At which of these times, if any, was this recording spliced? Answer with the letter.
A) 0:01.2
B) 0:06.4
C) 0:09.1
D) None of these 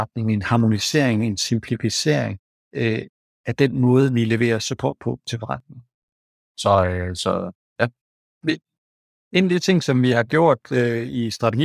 B